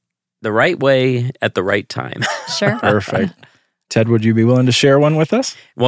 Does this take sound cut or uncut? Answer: uncut